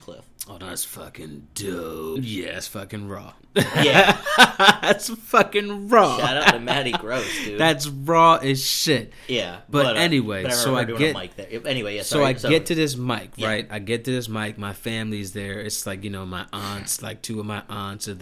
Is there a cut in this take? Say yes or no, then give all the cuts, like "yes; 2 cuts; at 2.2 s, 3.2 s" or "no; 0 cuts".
yes; 1 cut; at 2.2 s